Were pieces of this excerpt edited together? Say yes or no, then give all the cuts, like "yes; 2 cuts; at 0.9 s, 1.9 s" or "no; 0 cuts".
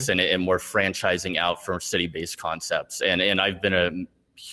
no; 0 cuts